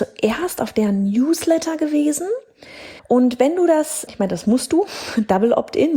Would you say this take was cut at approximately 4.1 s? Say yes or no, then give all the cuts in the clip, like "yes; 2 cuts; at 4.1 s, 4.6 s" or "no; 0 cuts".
yes; 2 cuts; at 3.0 s, 4.1 s